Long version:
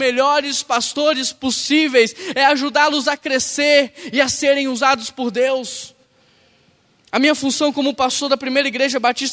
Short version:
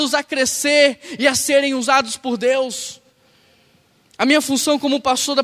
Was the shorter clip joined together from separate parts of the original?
no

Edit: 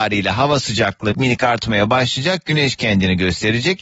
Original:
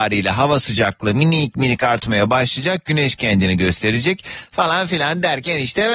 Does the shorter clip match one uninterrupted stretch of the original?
no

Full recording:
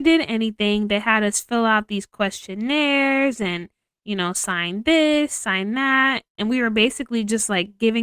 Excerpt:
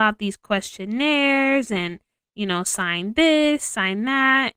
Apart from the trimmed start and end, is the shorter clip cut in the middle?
no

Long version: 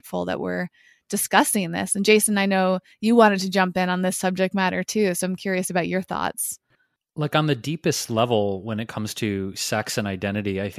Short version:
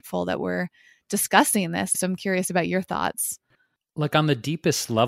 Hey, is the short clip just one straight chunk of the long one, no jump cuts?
no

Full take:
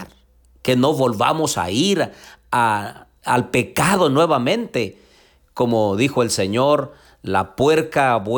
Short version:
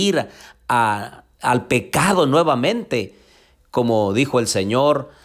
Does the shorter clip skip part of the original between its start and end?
no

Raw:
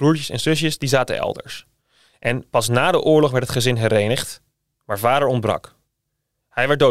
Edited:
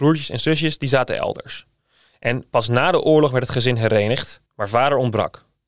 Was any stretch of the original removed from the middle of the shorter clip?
yes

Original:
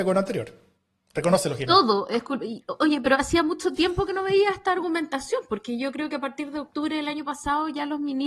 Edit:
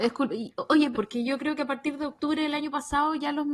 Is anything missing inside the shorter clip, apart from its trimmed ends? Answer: yes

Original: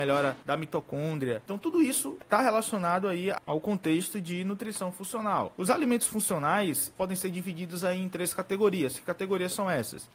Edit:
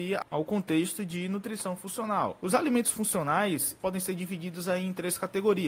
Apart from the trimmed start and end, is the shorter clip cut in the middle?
no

